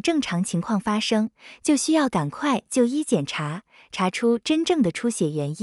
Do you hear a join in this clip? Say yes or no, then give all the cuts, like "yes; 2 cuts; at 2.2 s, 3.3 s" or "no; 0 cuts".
no; 0 cuts